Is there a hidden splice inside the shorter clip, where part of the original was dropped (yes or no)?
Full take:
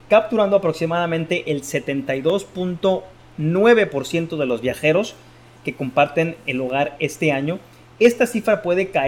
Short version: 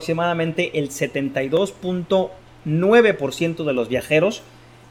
no